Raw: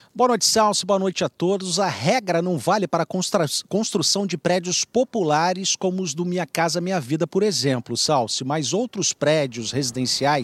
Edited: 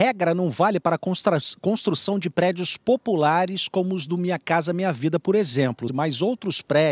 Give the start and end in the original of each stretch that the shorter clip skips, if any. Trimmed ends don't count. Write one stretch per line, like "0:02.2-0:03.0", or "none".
0:08.0-0:08.4